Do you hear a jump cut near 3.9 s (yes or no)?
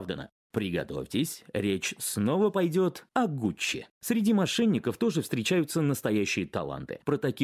yes